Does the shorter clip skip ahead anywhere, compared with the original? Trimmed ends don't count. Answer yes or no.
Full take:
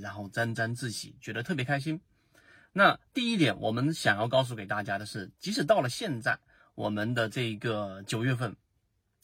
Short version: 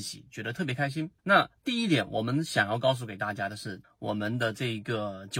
yes